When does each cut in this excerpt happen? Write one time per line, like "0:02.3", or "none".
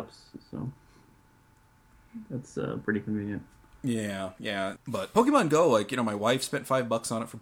0:04.8